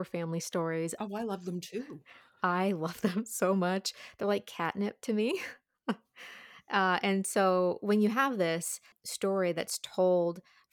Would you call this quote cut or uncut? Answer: uncut